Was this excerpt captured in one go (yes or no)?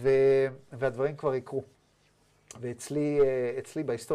yes